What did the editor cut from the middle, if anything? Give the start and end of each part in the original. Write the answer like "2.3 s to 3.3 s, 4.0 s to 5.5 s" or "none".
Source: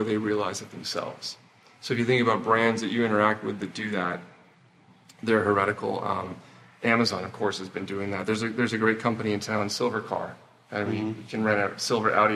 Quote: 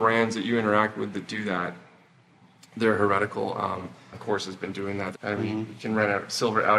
6.6 s to 7.3 s, 8.3 s to 10.6 s